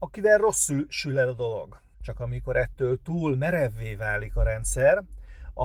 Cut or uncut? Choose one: cut